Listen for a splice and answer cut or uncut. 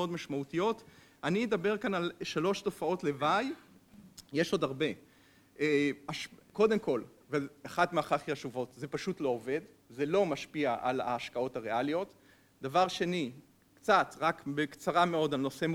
uncut